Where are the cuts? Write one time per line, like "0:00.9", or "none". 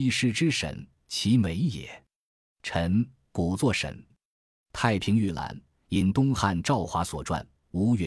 0:04.1